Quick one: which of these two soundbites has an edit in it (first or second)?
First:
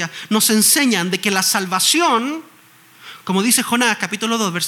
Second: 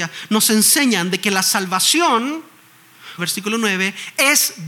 second